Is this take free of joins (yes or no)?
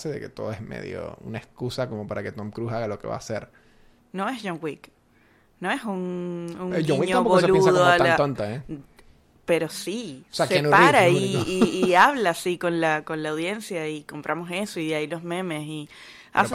no